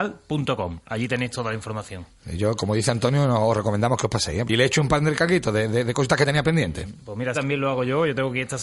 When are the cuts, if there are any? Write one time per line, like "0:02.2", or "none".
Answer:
0:04.5
0:07.3